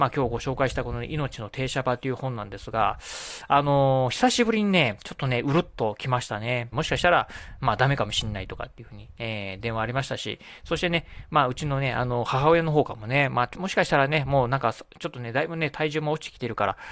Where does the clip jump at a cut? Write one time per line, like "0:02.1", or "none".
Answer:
0:06.7